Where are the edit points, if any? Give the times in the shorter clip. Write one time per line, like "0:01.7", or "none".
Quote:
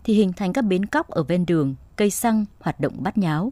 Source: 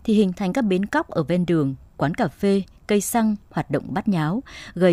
0:01.9